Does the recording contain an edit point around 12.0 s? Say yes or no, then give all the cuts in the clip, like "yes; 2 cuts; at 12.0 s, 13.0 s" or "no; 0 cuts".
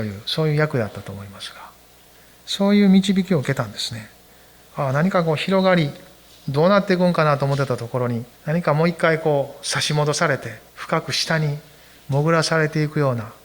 no; 2 cuts; at 8.3 s, 10.7 s